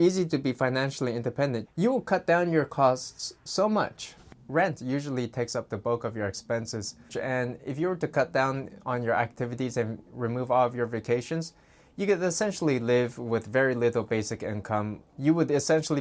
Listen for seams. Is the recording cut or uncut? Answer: cut